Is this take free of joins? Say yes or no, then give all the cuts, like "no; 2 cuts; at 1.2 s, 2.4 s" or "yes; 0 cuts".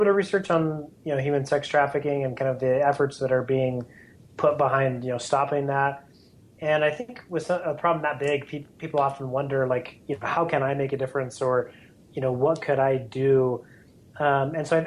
yes; 0 cuts